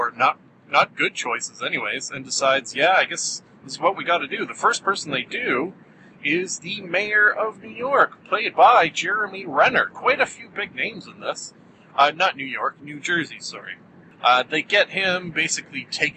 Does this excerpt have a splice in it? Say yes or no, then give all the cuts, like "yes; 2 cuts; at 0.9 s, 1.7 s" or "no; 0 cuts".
no; 0 cuts